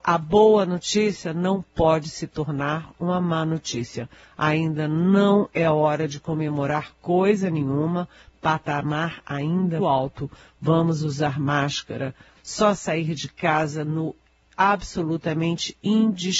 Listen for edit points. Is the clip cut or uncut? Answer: cut